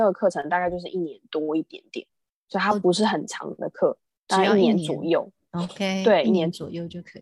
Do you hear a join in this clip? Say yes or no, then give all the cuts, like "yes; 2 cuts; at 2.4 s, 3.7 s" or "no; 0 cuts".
no; 0 cuts